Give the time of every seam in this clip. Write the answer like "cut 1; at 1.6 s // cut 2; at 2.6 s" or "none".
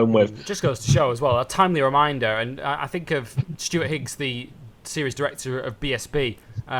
none

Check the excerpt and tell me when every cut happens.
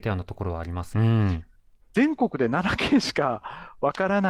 cut 1; at 0.9 s

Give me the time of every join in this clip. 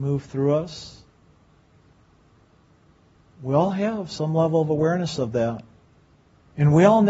none

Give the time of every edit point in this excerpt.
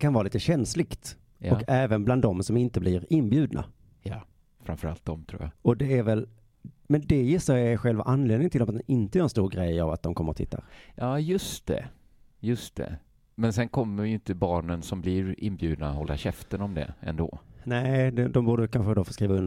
cut 1; at 5.5 s

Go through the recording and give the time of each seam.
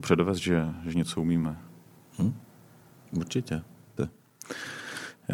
cut 1; at 4.0 s

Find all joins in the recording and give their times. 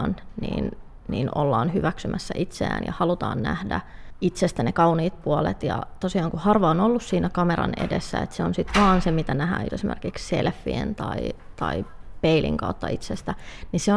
cut 1; at 9.7 s

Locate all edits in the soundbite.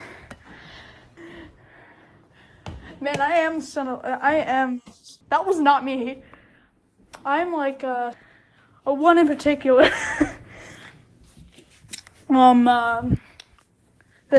cut 1; at 1.2 s // cut 2; at 5.2 s // cut 3; at 8.1 s

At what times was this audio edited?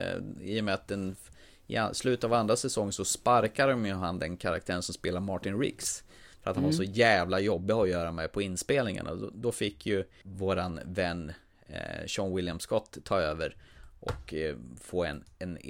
none

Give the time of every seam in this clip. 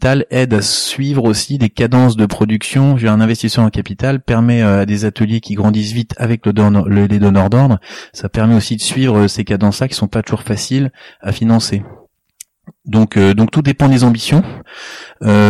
none

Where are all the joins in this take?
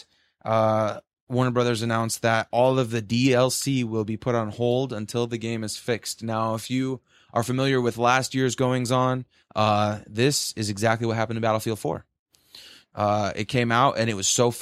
none

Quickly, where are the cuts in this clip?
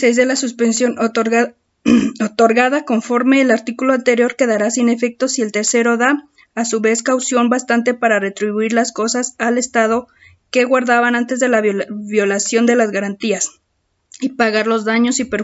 none

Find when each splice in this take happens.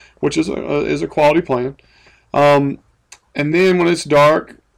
none

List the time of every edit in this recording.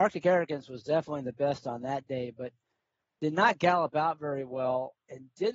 none

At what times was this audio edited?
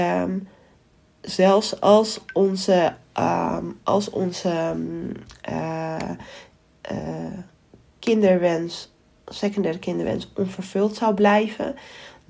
none

